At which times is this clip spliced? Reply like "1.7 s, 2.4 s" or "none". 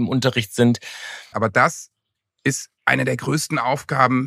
1.3 s, 2.8 s